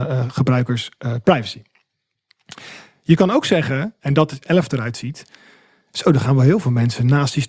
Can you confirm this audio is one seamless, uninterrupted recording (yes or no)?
no